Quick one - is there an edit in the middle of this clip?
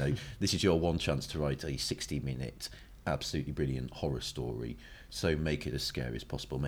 no; 0 cuts

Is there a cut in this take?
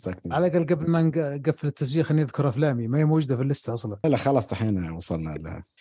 yes; 1 cut; at 4.0 s

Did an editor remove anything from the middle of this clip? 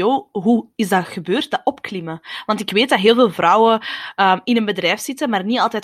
no; 0 cuts

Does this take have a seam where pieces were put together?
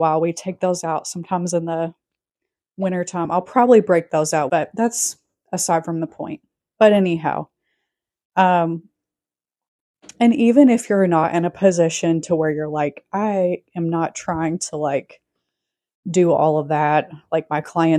yes; 1 cut; at 4.5 s

